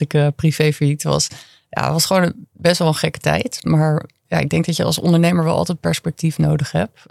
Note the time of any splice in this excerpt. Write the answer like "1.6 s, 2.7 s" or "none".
4.2 s